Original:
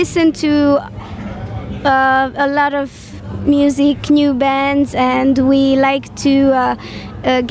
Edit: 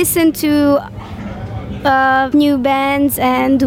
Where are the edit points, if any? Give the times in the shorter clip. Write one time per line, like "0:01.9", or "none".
0:02.3